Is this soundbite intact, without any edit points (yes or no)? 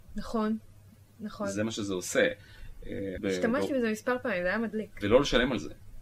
no